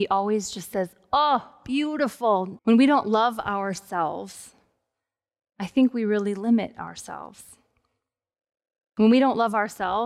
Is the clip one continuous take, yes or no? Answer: no